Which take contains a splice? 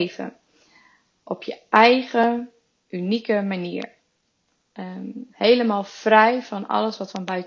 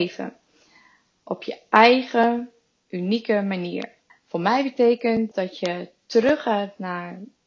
second; 2 cuts; at 4.1 s, 5.3 s

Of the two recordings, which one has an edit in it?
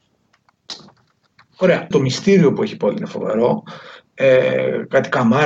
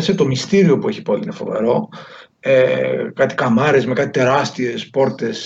first; 1 cut; at 1.9 s

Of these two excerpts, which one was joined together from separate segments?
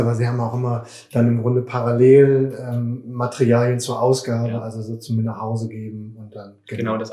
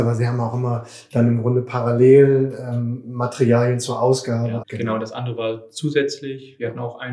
second; 1 cut; at 4.6 s

